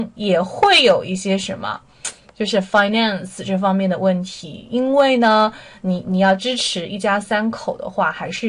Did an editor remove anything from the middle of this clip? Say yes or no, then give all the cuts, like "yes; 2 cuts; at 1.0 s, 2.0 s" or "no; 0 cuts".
no; 0 cuts